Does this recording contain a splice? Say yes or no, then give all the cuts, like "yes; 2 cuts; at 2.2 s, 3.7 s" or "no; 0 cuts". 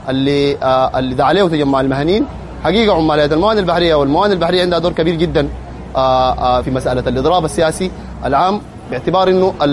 yes; 1 cut; at 6.6 s